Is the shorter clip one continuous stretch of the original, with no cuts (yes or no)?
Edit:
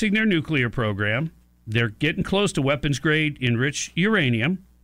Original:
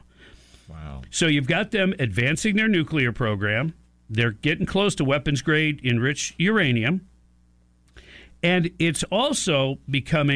yes